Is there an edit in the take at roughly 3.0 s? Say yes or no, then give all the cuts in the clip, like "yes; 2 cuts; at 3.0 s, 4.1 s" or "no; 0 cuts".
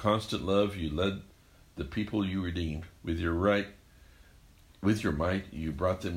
yes; 1 cut; at 3.0 s